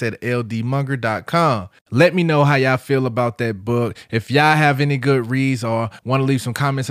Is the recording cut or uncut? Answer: cut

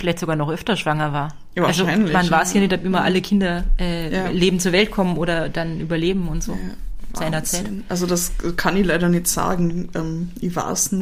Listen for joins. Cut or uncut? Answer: uncut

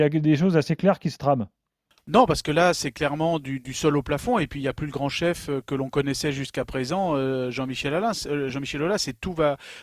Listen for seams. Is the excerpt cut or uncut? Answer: uncut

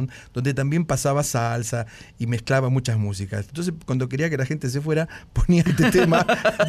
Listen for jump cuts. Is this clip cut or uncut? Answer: uncut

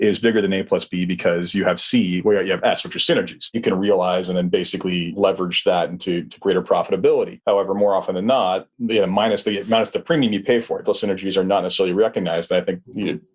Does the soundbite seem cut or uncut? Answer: cut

